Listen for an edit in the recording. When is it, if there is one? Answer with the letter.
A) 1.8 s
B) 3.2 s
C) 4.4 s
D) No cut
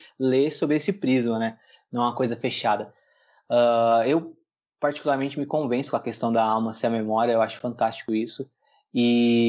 D